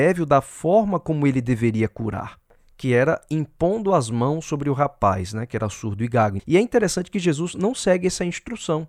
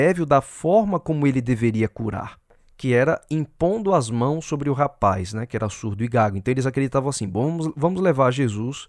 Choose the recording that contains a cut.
first; 1 cut; at 6.4 s

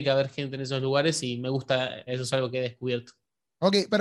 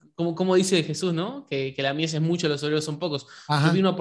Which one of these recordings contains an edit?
first; 1 cut; at 2.1 s

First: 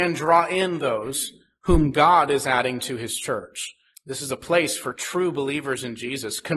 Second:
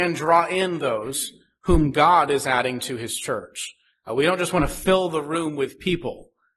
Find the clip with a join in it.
first; 1 cut; at 3.9 s

